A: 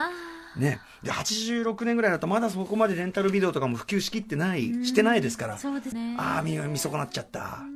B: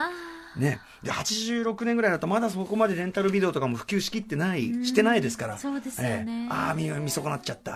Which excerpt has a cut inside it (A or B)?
A